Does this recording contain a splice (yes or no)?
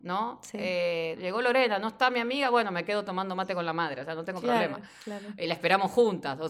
yes